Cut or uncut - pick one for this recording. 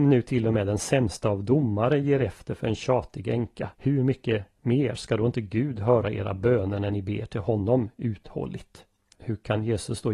cut